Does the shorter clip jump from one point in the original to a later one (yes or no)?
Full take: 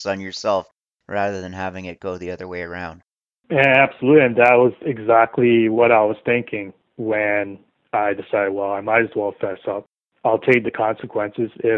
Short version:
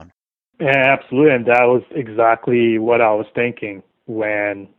no